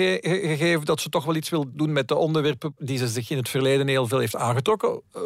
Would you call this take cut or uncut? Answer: uncut